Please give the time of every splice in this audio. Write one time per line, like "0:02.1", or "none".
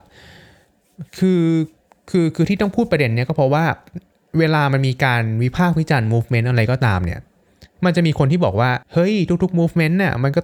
0:08.8